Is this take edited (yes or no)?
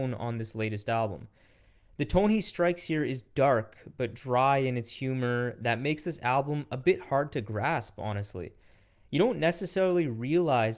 no